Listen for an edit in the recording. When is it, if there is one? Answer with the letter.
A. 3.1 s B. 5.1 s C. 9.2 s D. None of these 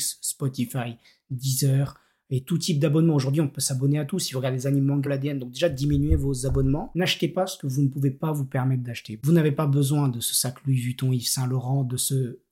B